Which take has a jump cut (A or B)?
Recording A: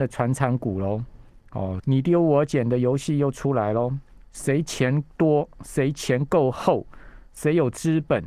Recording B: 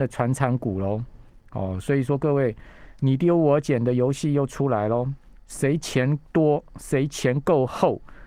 A